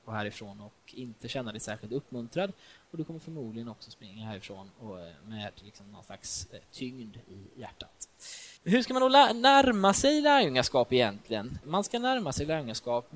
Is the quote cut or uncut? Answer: cut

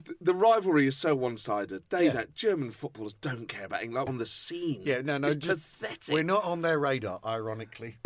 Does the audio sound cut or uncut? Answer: cut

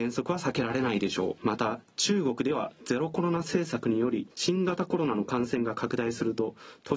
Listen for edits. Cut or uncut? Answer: cut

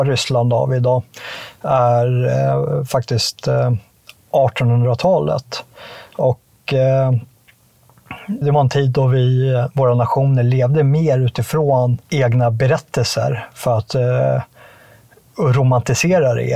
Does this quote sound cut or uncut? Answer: cut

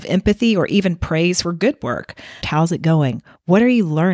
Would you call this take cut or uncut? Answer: cut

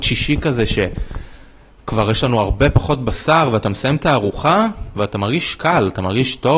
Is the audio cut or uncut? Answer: uncut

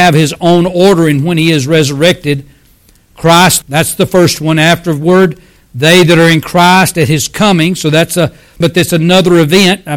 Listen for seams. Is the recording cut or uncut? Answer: cut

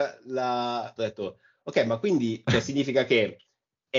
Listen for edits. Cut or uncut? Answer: cut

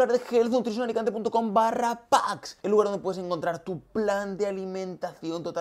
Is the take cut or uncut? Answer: uncut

